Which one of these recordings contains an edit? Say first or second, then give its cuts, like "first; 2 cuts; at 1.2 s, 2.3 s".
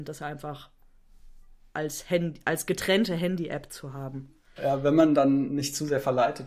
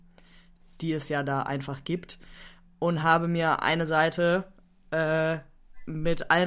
first; 1 cut; at 4.6 s